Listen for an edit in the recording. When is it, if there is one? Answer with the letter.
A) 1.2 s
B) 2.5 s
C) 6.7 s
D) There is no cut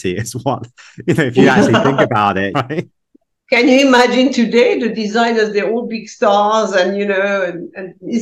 B